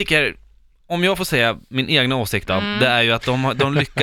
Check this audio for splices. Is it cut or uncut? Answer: uncut